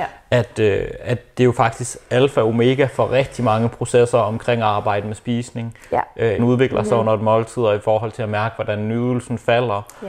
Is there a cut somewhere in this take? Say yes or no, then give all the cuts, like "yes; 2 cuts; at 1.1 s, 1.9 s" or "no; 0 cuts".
yes; 1 cut; at 6.4 s